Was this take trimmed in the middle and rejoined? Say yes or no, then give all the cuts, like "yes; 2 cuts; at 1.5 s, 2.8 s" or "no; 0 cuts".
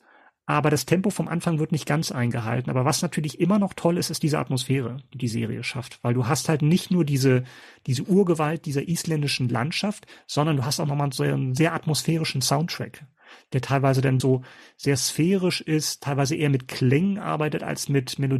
yes; 1 cut; at 14.2 s